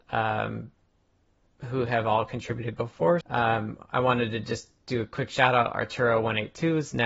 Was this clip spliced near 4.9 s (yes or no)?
no